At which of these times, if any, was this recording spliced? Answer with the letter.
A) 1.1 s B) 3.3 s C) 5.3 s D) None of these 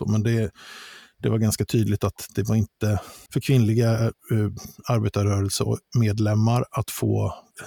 B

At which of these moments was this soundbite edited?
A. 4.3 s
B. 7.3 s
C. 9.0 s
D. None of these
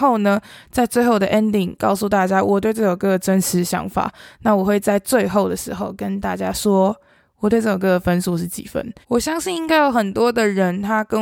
C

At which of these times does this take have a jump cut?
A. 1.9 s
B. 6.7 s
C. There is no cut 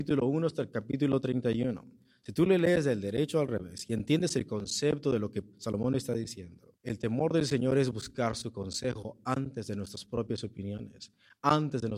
B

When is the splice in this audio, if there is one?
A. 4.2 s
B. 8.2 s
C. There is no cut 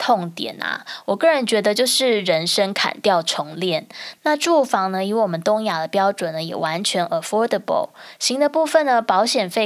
A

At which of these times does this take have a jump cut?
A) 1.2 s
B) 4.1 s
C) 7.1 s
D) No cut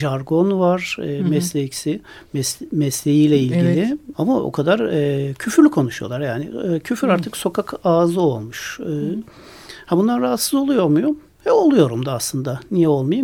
B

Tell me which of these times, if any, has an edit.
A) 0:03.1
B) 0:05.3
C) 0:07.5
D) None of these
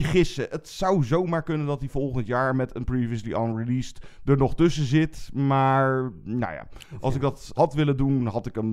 C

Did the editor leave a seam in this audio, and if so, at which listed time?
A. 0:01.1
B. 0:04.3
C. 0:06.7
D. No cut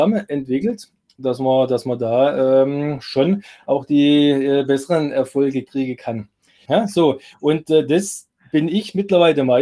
C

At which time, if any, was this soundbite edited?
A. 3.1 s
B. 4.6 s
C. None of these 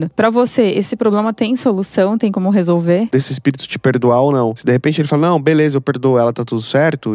A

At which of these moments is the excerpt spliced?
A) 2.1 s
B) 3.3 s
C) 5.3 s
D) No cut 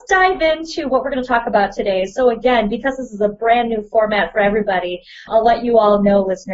C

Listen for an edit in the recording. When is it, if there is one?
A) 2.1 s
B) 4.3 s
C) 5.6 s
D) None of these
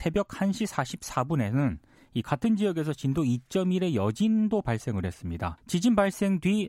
C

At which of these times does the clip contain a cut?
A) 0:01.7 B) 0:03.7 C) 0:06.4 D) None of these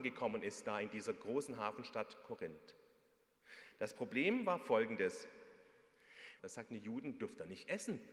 C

